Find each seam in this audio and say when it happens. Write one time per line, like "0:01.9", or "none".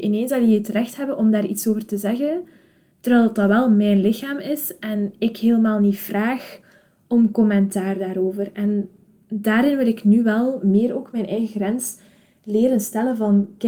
none